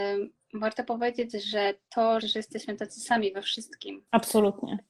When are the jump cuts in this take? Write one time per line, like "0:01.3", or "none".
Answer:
0:02.2